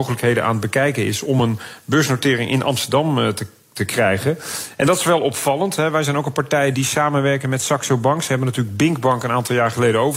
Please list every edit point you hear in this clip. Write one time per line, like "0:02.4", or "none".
0:06.7